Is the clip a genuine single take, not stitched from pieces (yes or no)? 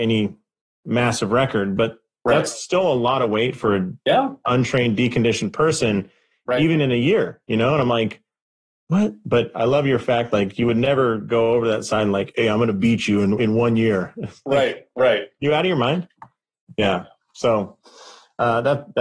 yes